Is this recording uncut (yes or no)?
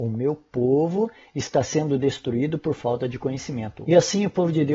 no